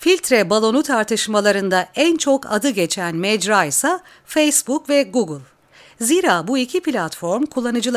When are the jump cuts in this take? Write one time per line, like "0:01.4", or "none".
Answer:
none